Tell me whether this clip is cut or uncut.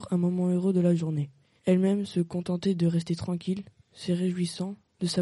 cut